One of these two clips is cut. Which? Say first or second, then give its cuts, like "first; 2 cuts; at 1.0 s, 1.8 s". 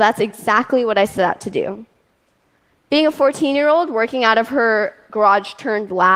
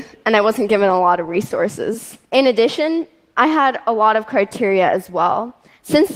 second; 1 cut; at 2.3 s